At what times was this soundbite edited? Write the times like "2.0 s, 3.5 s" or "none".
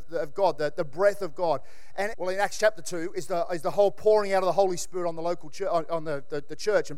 2.1 s